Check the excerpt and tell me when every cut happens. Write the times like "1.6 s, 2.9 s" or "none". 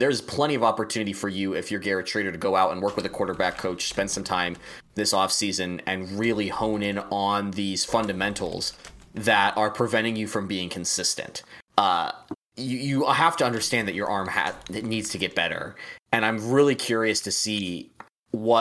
11.7 s

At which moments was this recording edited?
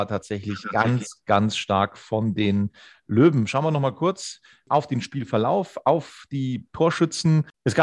none

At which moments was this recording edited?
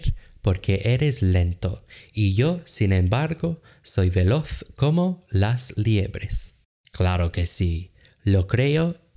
6.8 s

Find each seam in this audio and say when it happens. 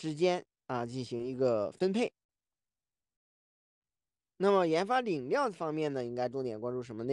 none

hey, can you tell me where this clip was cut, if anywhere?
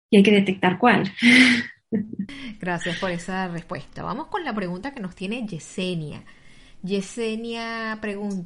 none

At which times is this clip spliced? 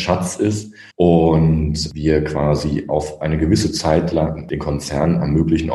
0.9 s

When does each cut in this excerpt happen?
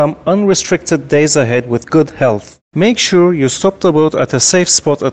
2.6 s

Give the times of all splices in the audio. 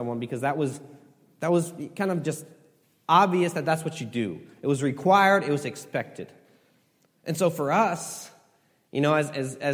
none

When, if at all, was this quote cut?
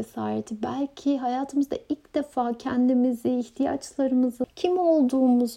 4.4 s

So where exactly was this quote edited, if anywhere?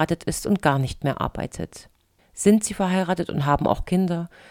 2.2 s

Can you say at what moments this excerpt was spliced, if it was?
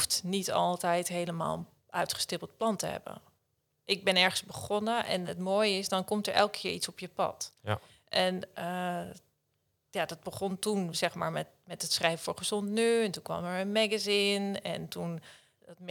none

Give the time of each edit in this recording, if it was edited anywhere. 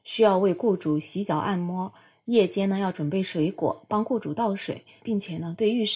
5.0 s

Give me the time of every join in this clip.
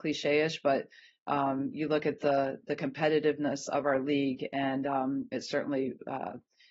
none

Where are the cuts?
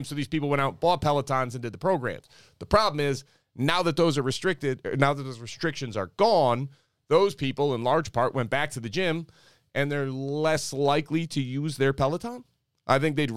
none

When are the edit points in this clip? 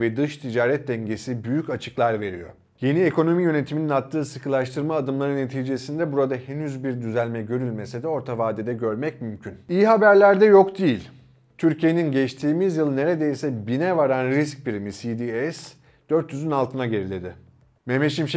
none

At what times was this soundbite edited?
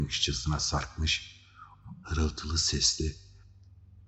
2.0 s

